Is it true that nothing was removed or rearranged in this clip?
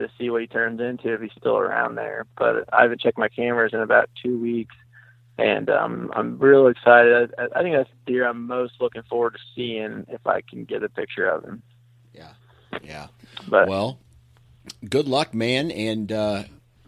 yes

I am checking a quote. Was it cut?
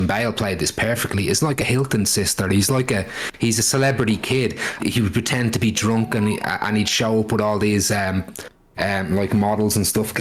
yes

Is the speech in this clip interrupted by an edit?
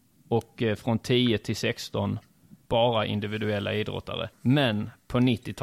yes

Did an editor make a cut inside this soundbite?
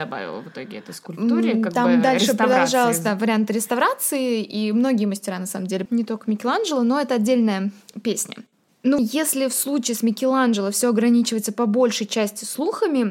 yes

